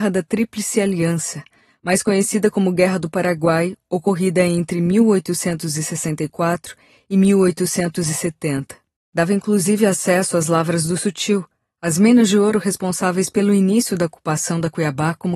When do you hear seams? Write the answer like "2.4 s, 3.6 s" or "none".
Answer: 9.0 s